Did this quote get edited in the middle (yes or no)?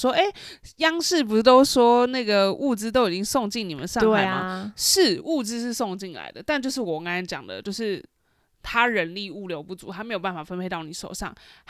no